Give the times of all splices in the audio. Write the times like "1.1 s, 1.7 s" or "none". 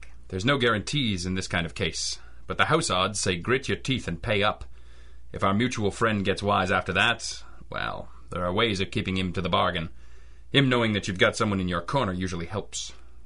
none